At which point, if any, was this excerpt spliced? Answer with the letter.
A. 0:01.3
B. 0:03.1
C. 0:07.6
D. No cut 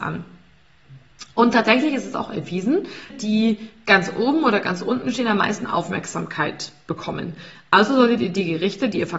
B